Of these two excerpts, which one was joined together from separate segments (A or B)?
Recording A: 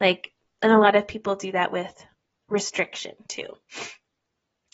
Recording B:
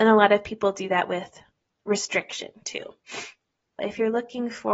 B